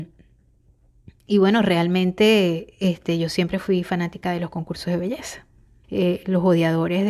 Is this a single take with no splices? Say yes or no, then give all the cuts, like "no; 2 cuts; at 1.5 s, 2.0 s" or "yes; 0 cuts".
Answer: no; 1 cut; at 5.8 s